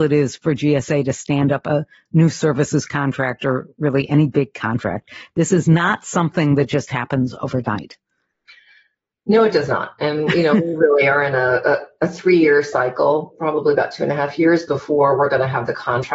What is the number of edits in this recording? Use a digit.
0